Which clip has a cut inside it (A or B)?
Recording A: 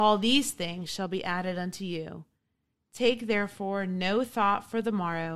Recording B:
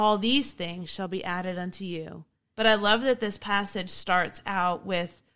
B